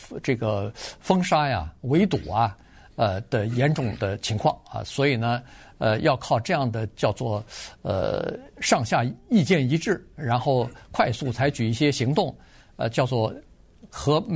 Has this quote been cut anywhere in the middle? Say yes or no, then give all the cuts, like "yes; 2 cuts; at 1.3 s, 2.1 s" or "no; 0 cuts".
no; 0 cuts